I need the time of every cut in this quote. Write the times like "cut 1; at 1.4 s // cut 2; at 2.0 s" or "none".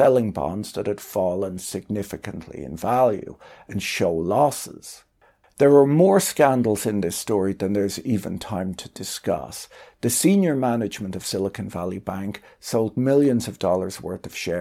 cut 1; at 5.4 s